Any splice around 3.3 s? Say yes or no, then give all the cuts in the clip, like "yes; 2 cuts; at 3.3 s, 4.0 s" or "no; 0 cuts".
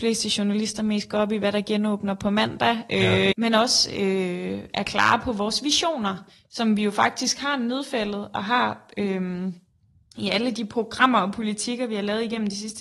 yes; 1 cut; at 3.3 s